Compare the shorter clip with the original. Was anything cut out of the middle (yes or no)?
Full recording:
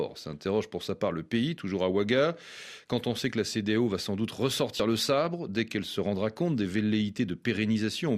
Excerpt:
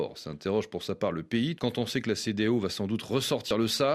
yes